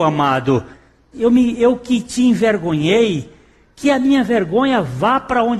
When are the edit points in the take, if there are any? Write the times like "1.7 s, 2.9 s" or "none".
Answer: 1.1 s